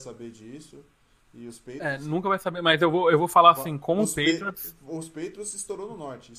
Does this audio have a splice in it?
no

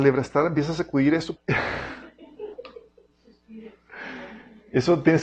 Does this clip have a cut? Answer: yes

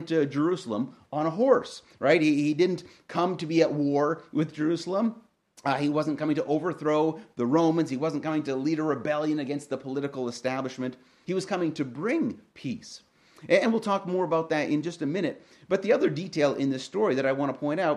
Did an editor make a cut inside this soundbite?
yes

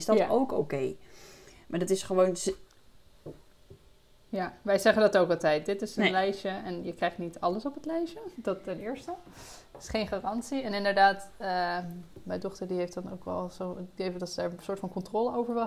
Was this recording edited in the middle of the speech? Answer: no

